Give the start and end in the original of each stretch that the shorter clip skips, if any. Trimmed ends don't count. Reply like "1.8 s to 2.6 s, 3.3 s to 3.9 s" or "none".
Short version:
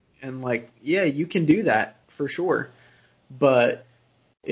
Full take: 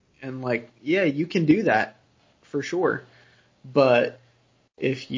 2.0 s to 2.4 s

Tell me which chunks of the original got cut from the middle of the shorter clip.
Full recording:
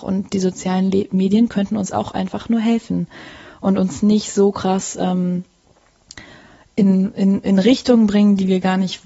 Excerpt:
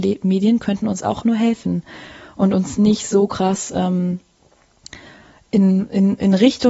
2.1 s to 2.5 s

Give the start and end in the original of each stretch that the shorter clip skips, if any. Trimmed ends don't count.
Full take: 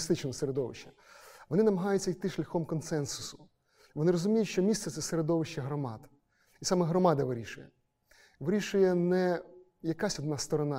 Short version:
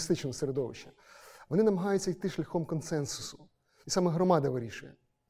3.8 s to 6.6 s

